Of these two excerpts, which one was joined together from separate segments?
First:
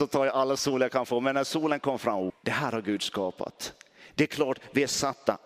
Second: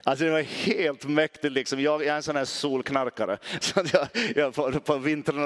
first; 1 cut; at 2.3 s

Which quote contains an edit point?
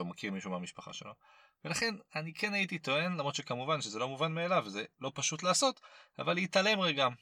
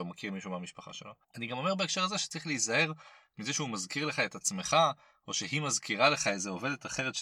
second; 1 cut; at 1.2 s

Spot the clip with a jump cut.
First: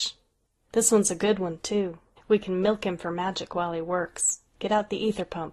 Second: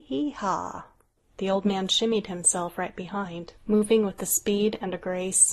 second; 2 cuts; at 1.2 s, 3.6 s

